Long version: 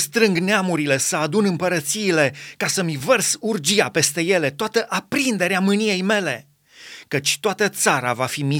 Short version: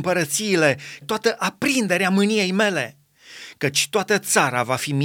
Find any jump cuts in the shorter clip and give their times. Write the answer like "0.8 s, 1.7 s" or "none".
1.0 s